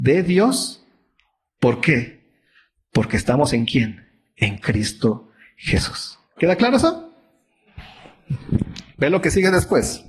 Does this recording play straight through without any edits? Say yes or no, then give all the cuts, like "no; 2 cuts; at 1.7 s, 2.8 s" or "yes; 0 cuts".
yes; 0 cuts